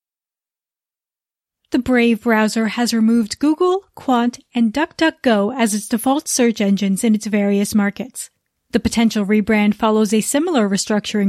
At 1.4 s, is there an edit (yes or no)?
no